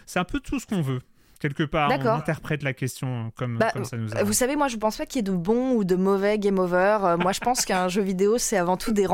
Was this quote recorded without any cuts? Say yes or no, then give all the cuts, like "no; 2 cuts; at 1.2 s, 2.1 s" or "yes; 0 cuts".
yes; 0 cuts